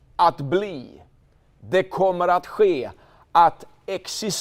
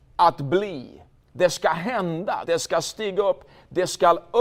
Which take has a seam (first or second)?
second